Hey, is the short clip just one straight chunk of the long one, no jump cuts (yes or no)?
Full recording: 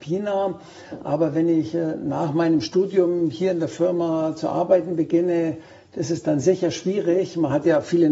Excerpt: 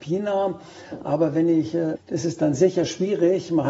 no